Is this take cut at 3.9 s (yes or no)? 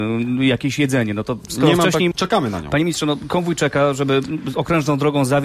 no